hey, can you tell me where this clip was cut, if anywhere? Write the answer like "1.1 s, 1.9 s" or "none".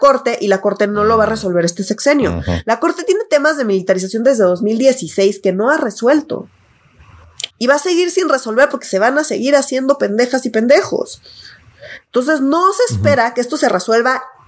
7.5 s